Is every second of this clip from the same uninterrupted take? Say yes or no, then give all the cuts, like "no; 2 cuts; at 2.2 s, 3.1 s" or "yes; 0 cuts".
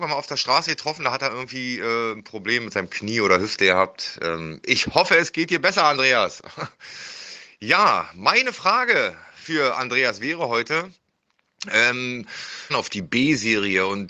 no; 1 cut; at 12.7 s